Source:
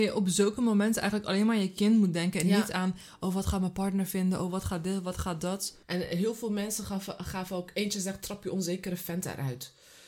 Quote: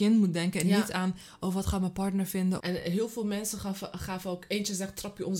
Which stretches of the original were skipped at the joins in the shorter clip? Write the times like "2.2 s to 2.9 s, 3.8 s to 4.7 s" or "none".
4.4 s to 5.8 s